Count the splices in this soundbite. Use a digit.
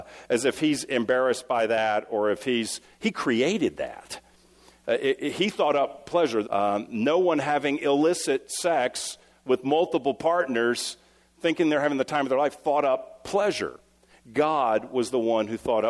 1